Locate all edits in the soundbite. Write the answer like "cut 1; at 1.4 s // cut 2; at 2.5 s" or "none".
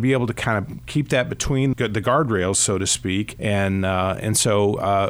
cut 1; at 1.7 s // cut 2; at 3.4 s